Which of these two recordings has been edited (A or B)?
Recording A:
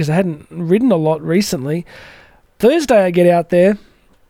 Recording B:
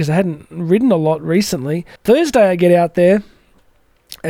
B